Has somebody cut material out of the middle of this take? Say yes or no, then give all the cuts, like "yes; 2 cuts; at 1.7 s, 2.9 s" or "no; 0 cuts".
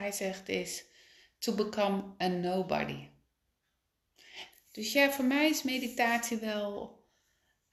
yes; 1 cut; at 4.5 s